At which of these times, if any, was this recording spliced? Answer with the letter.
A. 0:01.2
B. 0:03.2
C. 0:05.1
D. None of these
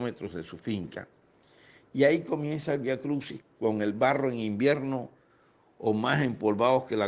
D